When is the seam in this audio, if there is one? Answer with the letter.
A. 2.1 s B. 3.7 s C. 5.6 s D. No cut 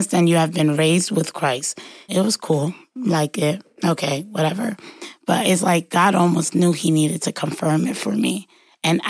A